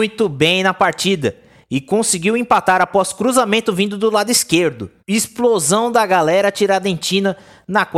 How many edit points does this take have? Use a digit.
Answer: 1